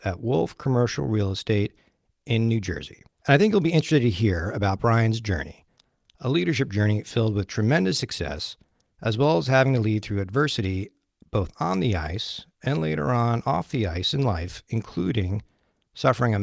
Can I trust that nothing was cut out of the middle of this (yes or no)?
yes